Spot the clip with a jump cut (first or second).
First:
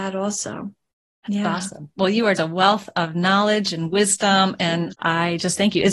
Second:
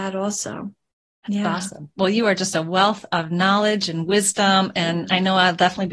first